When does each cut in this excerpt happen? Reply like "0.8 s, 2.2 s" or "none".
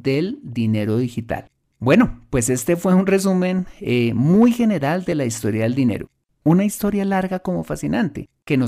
1.6 s